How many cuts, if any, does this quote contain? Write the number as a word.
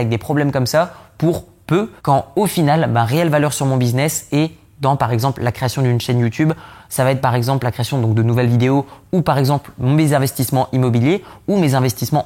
one